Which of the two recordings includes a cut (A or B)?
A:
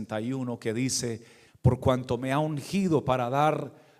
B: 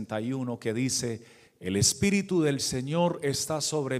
A